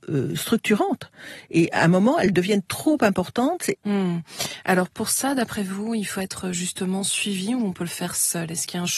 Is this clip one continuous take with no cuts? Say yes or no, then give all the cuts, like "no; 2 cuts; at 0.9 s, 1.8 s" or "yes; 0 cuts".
no; 1 cut; at 3.7 s